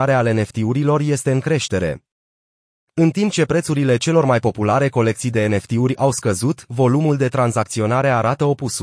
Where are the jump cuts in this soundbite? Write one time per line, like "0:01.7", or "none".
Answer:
none